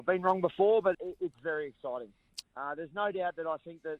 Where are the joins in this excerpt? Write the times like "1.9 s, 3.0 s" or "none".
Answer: 0.9 s, 2.4 s